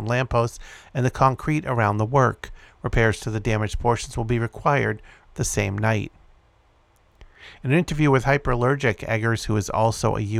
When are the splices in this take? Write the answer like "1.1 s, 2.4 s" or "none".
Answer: 5.2 s